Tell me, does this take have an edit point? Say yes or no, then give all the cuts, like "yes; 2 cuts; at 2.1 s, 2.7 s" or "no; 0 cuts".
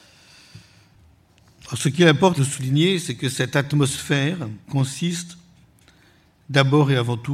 yes; 2 cuts; at 2.4 s, 4.6 s